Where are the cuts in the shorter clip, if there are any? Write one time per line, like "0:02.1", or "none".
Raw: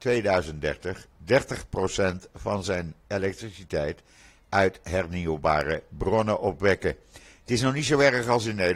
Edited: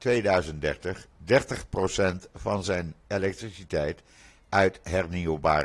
none